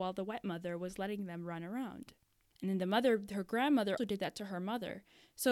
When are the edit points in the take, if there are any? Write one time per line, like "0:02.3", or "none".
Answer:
0:02.5
0:04.0